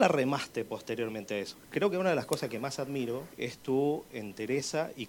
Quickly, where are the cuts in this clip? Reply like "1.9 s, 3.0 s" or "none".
1.5 s, 3.3 s

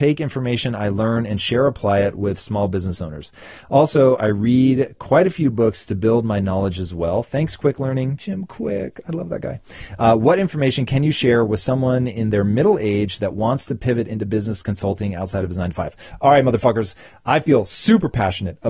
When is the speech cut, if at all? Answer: none

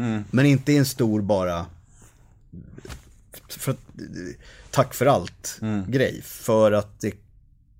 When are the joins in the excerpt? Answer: none

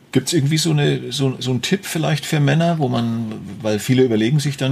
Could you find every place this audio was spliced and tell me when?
none

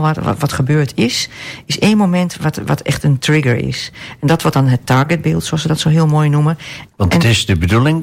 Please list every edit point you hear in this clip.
6.9 s

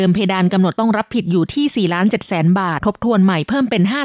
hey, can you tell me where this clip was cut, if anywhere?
2.8 s

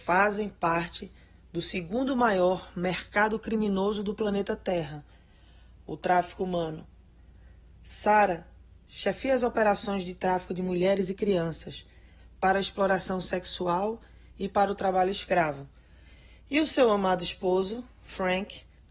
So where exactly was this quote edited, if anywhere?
none

